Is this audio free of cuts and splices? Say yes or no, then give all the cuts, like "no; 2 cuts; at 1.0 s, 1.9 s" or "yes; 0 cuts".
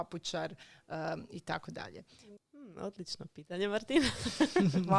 no; 1 cut; at 2.4 s